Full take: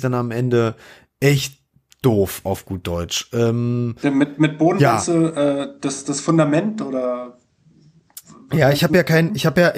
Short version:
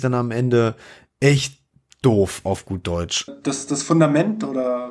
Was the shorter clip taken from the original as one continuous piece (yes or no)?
no